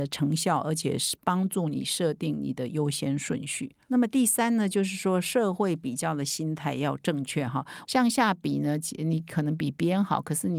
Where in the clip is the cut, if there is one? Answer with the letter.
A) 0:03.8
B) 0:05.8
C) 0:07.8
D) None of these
C